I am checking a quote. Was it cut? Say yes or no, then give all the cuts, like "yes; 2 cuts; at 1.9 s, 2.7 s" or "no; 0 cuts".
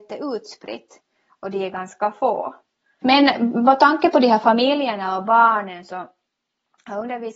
yes; 1 cut; at 3.0 s